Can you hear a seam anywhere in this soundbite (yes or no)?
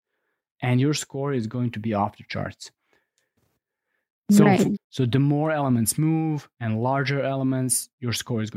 yes